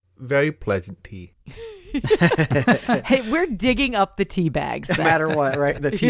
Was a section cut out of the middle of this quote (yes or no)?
yes